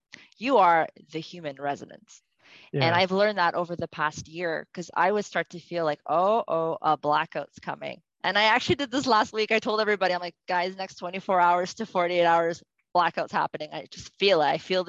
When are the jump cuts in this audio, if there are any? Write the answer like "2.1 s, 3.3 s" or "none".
none